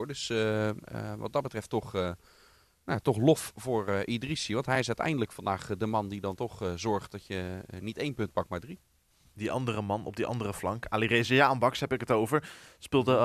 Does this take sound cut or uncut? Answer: uncut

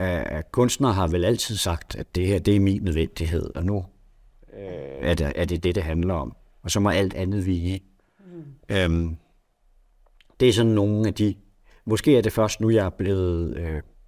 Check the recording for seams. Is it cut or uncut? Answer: uncut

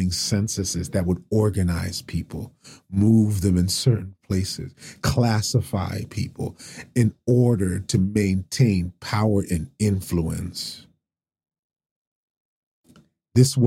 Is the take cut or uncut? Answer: uncut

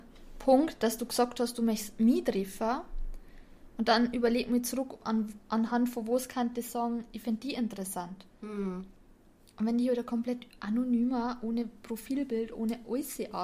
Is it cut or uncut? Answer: uncut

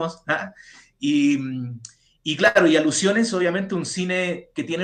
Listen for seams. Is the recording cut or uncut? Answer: uncut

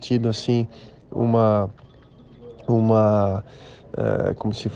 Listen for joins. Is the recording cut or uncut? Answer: uncut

